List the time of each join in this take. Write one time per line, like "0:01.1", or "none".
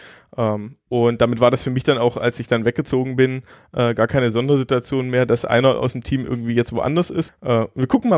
0:07.3